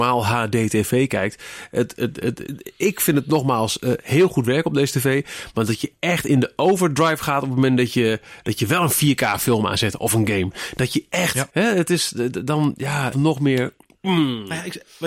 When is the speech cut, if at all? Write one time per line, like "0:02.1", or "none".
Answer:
0:02.5
0:11.5
0:13.1